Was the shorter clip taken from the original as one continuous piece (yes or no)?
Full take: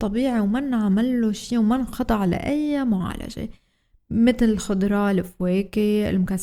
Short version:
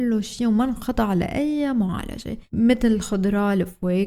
no